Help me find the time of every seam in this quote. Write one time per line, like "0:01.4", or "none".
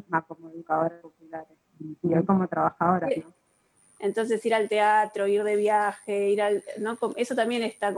0:01.7
0:04.0

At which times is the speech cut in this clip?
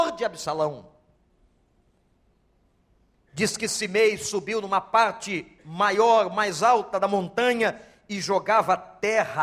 none

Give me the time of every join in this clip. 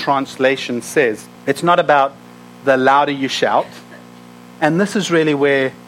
0:01.4
0:04.5

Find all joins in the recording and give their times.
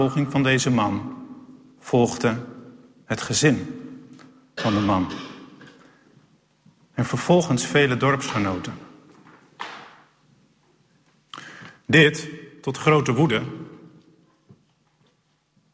none

